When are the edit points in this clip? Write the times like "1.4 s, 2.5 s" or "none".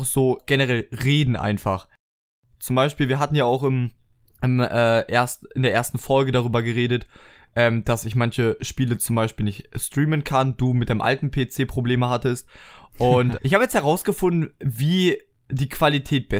2.5 s, 13.4 s